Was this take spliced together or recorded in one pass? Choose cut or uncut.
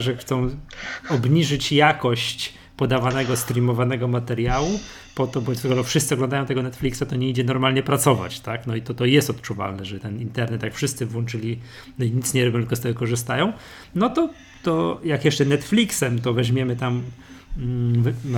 uncut